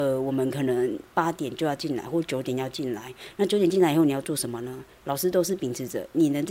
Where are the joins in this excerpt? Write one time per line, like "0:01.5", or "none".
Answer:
none